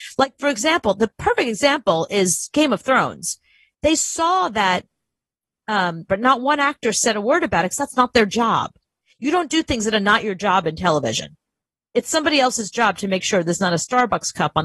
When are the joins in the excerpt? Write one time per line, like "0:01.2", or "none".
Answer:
0:06.1